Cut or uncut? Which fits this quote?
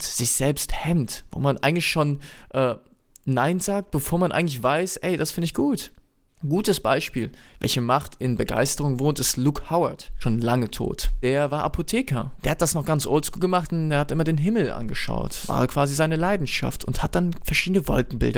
uncut